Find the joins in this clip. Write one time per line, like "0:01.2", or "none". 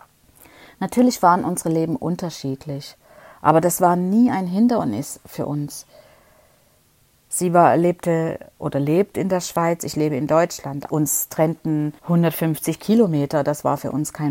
0:10.9
0:12.0